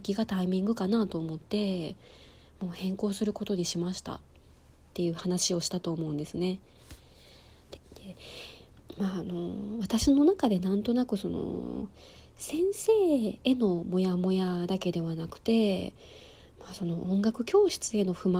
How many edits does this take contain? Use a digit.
2